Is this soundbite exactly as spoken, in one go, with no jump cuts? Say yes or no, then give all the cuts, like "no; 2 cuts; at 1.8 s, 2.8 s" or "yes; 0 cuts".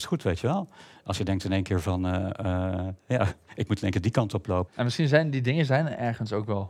no; 1 cut; at 4.7 s